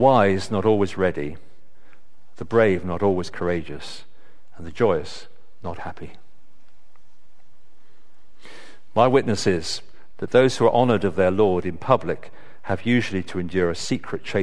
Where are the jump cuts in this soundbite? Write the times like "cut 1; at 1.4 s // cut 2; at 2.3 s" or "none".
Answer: cut 1; at 5.8 s